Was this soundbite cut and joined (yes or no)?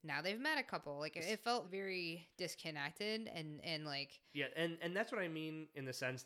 yes